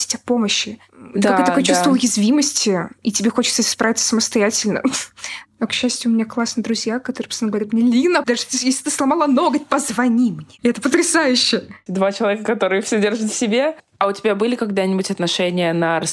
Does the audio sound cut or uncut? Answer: cut